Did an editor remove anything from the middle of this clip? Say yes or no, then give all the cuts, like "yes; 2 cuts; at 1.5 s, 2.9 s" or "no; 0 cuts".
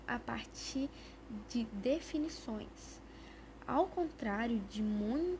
no; 0 cuts